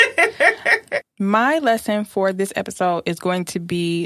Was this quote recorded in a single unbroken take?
no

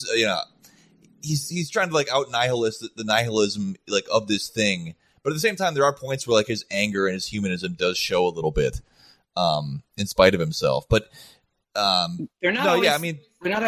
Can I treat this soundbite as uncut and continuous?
yes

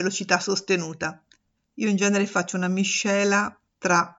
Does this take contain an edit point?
yes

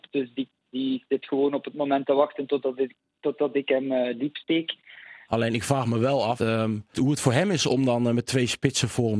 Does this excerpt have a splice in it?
yes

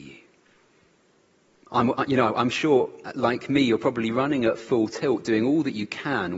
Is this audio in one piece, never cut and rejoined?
yes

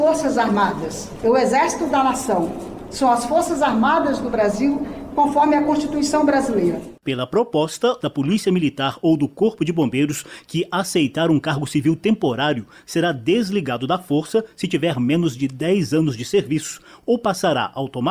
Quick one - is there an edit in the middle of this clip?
yes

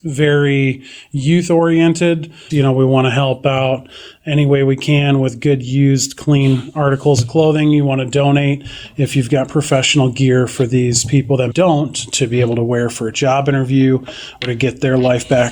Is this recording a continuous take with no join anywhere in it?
no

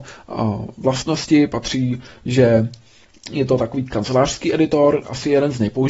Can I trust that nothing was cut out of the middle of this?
yes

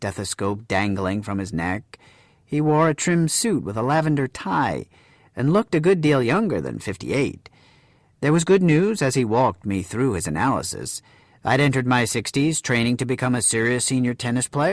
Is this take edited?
no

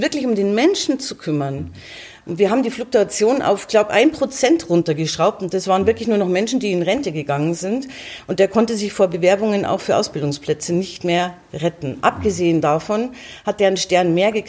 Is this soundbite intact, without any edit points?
yes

